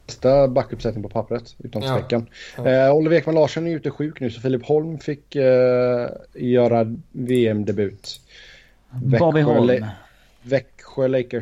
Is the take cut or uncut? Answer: uncut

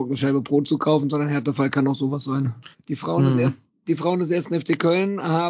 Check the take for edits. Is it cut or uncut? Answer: cut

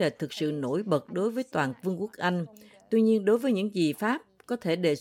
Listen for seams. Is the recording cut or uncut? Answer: uncut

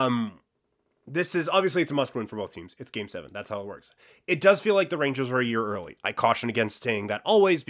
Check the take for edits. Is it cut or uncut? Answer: uncut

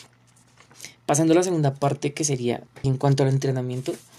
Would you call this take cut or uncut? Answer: cut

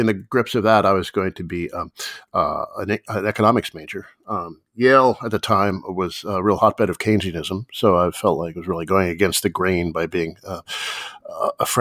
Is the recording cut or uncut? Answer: uncut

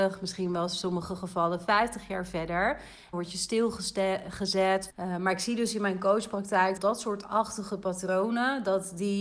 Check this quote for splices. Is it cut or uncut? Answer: cut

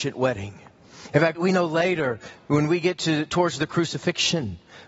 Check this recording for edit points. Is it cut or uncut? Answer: cut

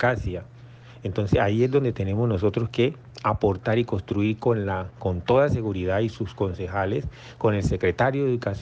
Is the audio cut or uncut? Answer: cut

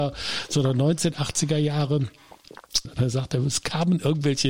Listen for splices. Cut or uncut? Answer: cut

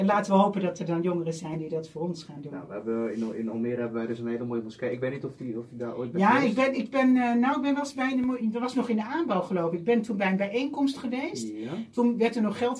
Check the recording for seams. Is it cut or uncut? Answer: uncut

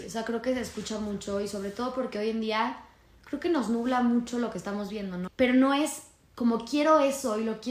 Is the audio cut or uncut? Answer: cut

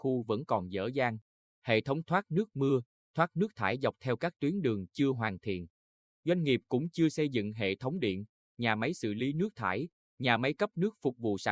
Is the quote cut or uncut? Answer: uncut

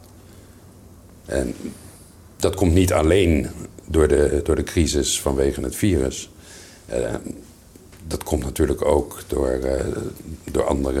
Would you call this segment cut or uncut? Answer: uncut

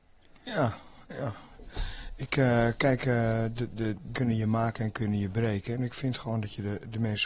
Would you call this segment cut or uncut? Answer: cut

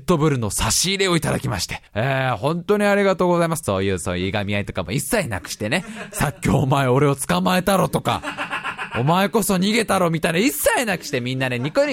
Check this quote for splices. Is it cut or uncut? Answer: cut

